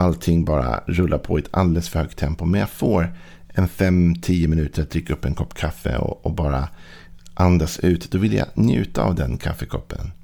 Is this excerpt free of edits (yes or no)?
yes